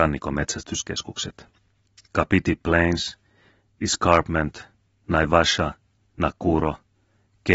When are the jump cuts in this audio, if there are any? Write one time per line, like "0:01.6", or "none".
none